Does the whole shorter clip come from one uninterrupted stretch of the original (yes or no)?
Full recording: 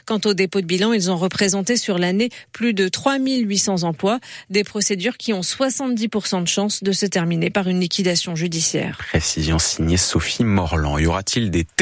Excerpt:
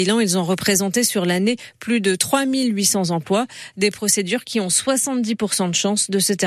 yes